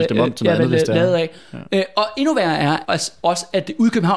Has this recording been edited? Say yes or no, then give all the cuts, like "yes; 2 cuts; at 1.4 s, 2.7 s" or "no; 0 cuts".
yes; 1 cut; at 2.8 s